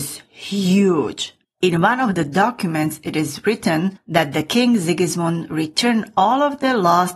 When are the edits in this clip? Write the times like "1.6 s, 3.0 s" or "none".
1.4 s

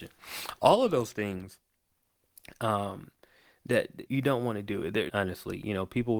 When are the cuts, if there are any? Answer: 4.1 s, 5.1 s

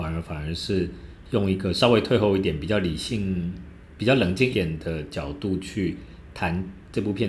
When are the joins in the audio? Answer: 4.5 s

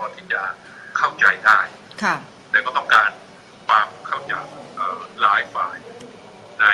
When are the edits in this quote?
4.3 s

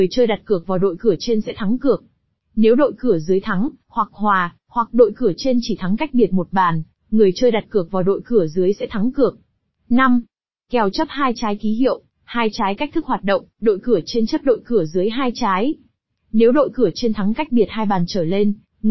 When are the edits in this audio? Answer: none

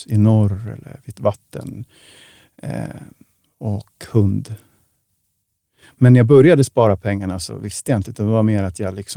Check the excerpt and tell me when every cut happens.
none

